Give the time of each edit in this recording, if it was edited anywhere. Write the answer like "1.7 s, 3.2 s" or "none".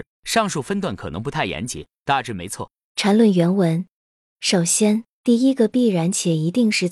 2.8 s, 4.3 s